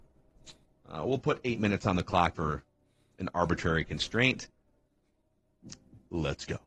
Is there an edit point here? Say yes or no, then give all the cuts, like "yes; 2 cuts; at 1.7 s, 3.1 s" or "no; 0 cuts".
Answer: yes; 1 cut; at 2.3 s